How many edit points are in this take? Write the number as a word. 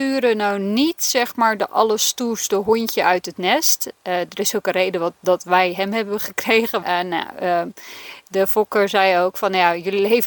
one